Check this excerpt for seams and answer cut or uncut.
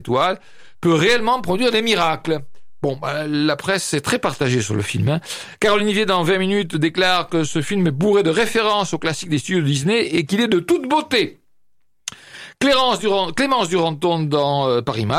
uncut